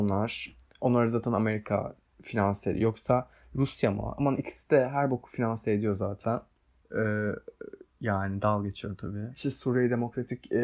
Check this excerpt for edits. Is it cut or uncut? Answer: cut